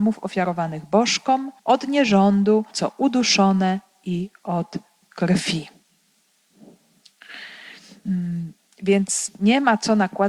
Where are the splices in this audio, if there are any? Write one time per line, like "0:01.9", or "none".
0:01.6
0:02.7